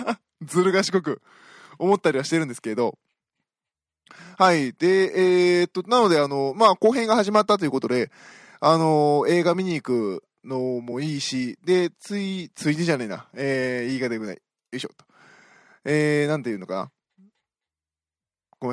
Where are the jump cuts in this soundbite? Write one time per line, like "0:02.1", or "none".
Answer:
none